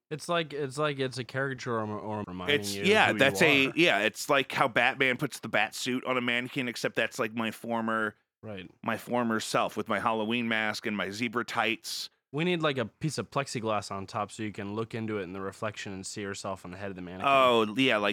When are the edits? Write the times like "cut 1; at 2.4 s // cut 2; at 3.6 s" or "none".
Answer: cut 1; at 2.2 s